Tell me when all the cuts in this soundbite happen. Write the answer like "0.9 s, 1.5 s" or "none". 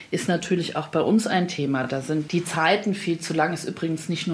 none